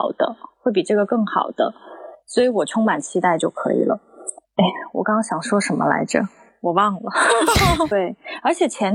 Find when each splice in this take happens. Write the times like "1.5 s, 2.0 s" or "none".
4.4 s, 7.9 s